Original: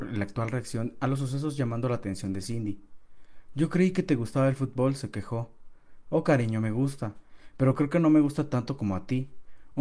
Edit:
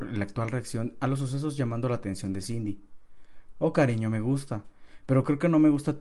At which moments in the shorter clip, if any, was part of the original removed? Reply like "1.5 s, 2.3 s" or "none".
3.5 s